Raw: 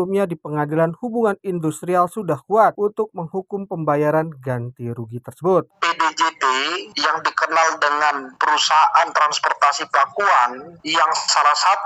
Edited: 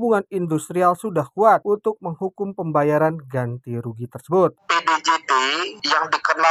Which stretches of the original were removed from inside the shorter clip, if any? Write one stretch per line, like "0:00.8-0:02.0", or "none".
none